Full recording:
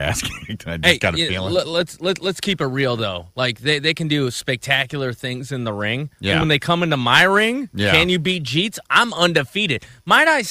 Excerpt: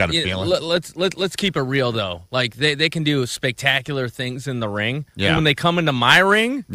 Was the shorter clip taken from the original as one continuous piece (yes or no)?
yes